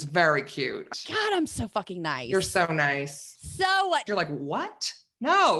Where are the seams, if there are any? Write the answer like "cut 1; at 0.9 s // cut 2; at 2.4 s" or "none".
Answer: cut 1; at 0.9 s // cut 2; at 4.1 s